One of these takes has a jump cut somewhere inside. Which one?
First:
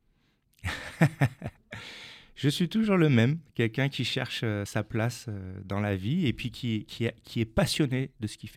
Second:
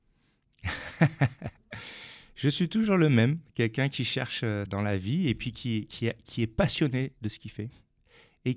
second; 1 cut; at 4.7 s

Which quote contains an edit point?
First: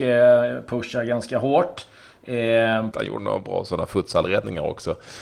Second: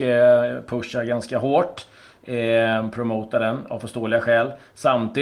first; 1 cut; at 2.9 s

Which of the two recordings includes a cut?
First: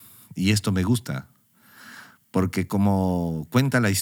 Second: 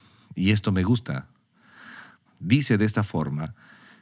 second; 1 cut; at 2.3 s

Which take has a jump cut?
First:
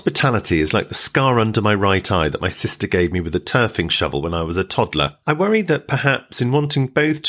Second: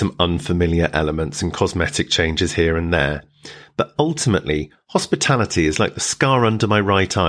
first; 1 cut; at 5.2 s

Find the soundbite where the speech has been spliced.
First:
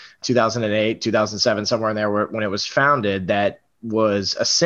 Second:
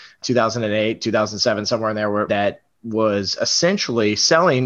second; 1 cut; at 2.3 s

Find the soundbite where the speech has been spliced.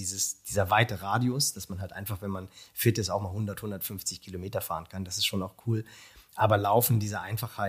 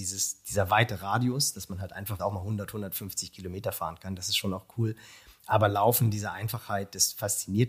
second; 1 cut; at 2.2 s

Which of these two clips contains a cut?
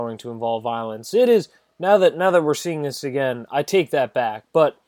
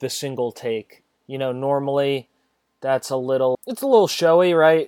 second; 2 cuts; at 1.1 s, 3.5 s

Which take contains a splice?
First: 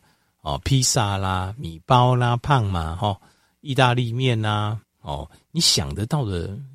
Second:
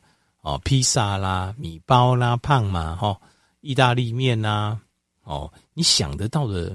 first; 1 cut; at 4.8 s

